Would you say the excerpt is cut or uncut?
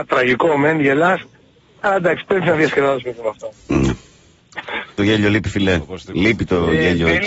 cut